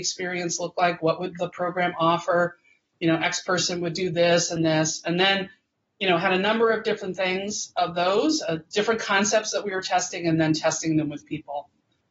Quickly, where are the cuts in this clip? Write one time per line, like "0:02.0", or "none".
0:04.6